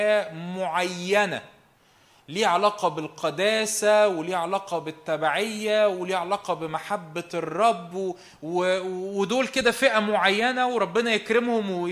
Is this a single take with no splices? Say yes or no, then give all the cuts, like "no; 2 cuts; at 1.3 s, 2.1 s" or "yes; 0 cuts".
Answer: yes; 0 cuts